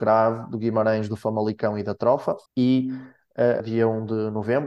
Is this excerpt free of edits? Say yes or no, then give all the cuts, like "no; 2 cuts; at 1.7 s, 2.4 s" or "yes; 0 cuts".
no; 2 cuts; at 2.5 s, 3.6 s